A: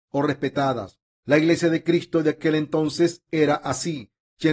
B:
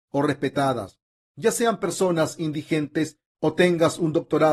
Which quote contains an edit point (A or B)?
A